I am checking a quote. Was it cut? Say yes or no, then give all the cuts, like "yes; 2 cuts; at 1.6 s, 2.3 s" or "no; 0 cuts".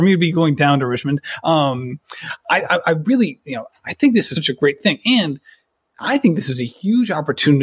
yes; 1 cut; at 4.3 s